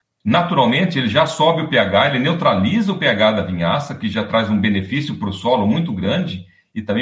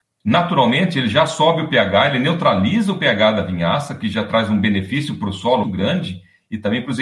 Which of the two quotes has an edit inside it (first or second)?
second